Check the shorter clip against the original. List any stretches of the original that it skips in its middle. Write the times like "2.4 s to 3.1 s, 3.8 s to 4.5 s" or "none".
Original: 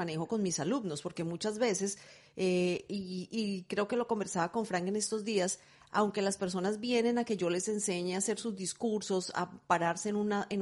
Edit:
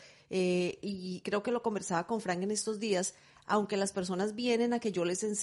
3.3 s to 3.7 s